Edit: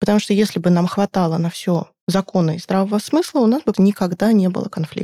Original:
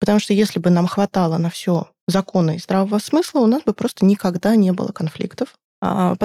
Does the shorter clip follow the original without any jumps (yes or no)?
no